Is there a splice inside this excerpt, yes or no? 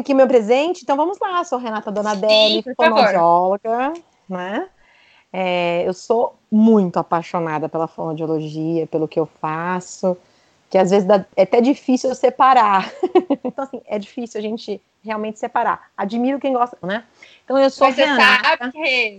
yes